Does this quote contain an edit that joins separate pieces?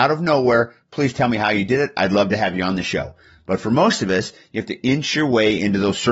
no; 0 cuts

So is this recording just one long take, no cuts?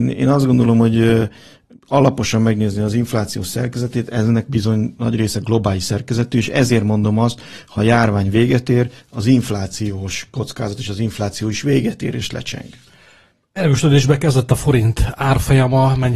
yes; 0 cuts

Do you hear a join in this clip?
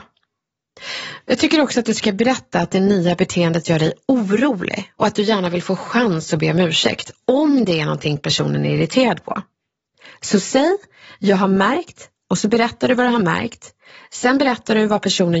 no; 0 cuts

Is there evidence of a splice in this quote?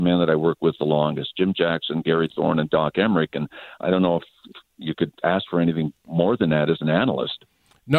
yes; 1 cut; at 3.7 s

